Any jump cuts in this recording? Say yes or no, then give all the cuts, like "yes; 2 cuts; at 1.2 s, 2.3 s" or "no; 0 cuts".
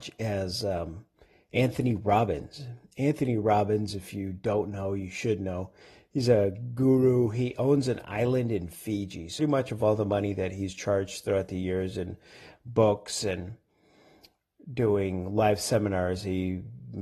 yes; 1 cut; at 9.4 s